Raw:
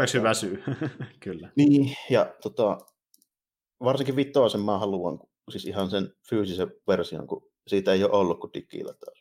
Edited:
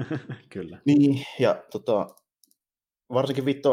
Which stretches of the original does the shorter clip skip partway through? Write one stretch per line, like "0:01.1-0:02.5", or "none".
none